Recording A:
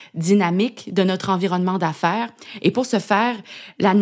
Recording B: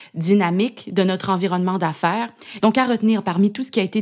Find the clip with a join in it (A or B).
B